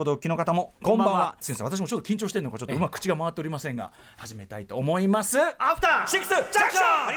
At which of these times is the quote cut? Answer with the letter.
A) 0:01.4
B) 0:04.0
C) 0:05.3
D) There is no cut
A